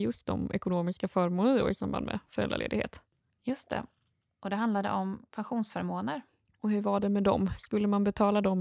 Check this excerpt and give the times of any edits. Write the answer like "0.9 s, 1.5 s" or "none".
none